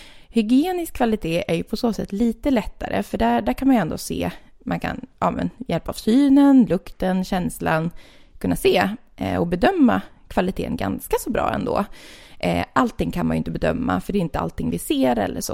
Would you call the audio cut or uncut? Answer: uncut